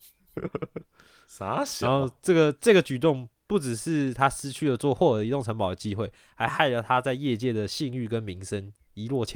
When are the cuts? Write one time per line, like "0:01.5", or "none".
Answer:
none